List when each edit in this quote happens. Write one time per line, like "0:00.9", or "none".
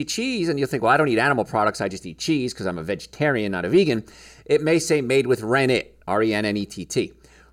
none